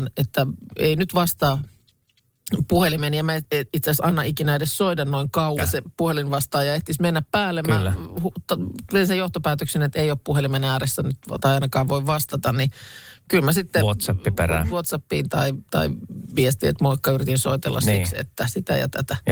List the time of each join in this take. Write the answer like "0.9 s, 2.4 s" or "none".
5.6 s, 14.7 s